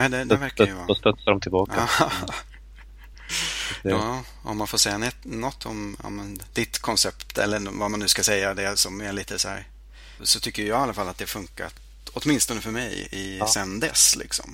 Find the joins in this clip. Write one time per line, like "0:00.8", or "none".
0:10.2